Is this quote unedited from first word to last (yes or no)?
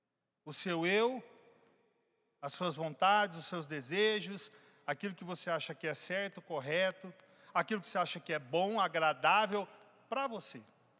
yes